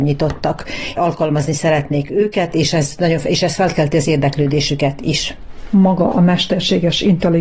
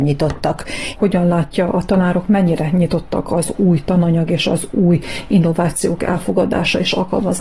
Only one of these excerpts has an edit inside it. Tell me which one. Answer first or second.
second